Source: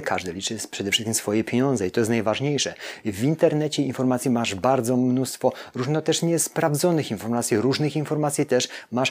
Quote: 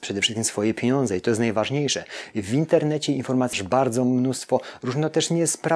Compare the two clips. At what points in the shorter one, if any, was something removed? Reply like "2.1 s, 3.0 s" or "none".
3.5 s